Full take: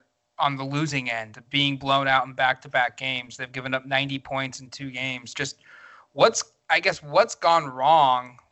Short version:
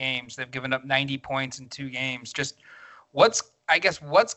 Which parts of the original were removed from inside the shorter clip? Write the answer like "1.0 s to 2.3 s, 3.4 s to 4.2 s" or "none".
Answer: none